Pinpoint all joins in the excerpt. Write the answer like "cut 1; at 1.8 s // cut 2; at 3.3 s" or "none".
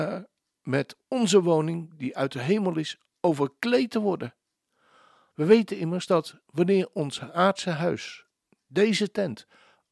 cut 1; at 5.3 s